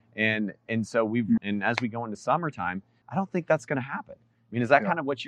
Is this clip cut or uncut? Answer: cut